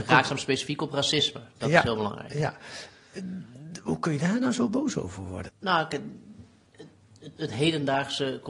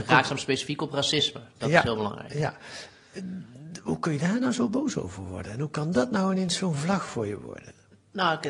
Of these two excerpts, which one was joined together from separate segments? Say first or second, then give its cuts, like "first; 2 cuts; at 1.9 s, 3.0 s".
first; 2 cuts; at 5.5 s, 7.4 s